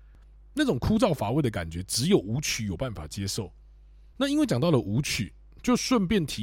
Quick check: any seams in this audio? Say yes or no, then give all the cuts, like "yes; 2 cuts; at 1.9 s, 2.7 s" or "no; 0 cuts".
yes; 1 cut; at 4.1 s